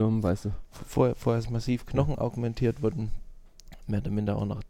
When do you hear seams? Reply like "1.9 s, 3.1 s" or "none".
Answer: 1.4 s